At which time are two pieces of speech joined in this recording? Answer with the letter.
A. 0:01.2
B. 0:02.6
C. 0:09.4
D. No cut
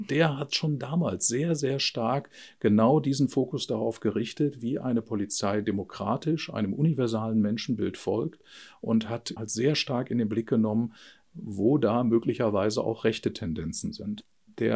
C